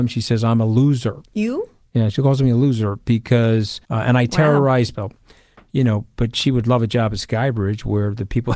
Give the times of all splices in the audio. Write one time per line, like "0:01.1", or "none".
0:03.8
0:04.9

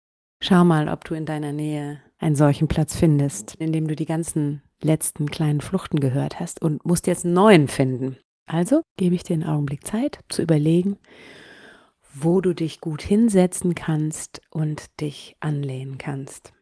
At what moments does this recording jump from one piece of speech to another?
0:03.6

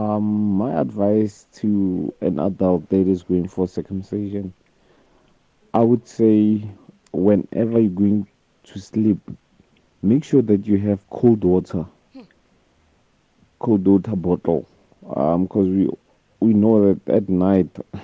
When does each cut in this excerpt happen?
none

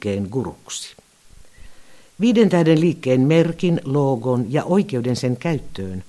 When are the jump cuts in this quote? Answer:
none

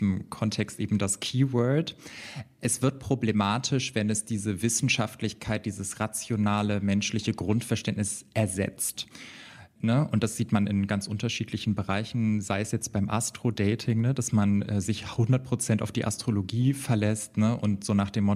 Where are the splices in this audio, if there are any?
none

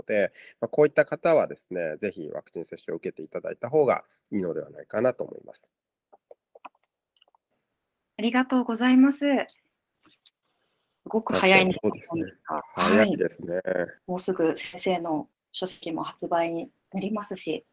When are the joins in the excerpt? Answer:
0:09.9
0:14.0

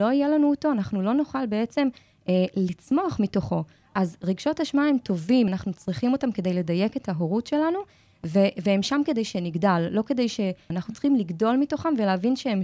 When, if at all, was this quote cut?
0:05.5
0:10.7

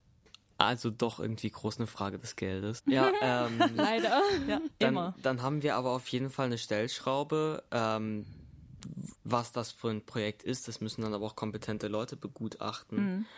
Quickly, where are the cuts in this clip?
0:02.8
0:09.1

